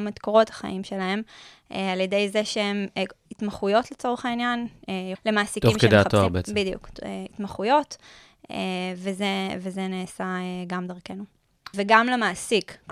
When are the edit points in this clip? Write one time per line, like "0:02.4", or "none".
0:05.1
0:11.7